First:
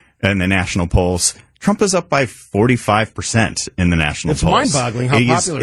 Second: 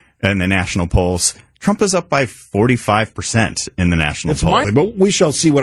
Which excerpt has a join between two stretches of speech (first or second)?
second